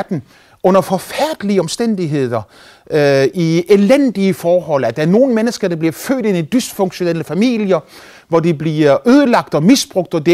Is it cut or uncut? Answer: uncut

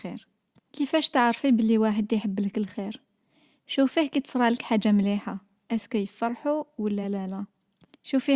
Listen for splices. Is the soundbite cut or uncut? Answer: uncut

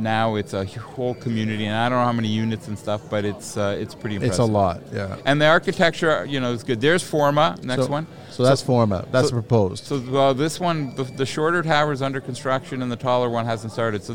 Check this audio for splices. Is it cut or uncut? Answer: uncut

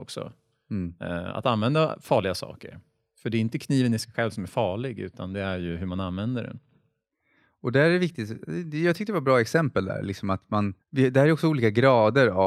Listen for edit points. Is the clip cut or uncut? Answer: cut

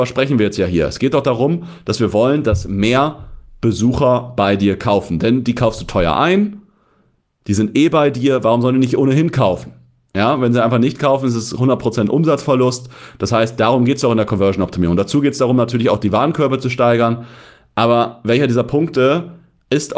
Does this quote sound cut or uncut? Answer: uncut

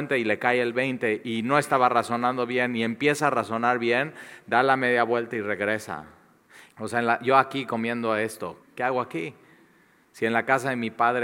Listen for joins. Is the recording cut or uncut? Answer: cut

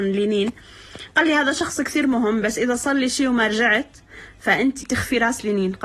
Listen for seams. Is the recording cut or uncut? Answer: cut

